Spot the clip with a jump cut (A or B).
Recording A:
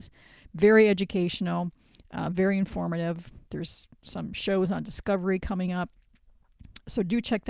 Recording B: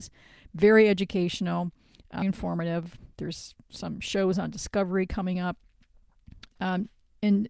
B